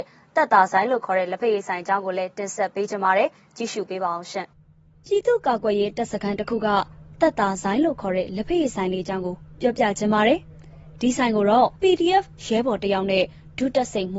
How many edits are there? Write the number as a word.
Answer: two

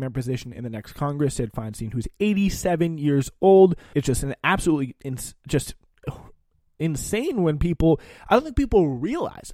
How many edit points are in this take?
one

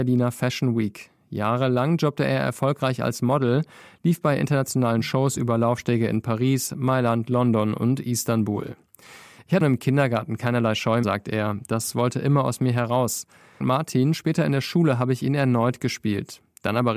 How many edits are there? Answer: three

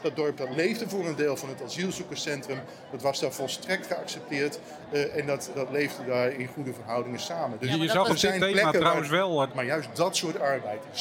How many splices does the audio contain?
two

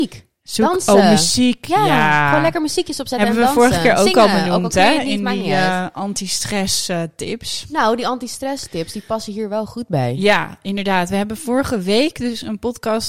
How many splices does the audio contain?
zero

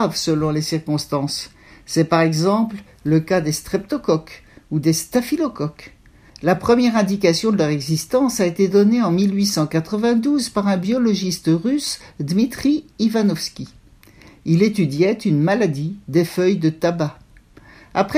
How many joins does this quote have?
one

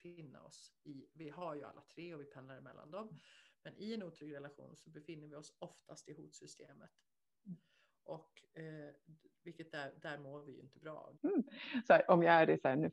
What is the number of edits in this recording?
one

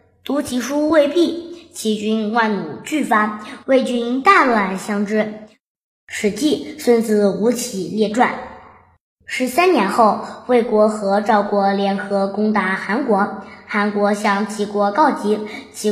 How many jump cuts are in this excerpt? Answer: one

